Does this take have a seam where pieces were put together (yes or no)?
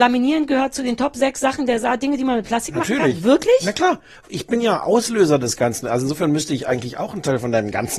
no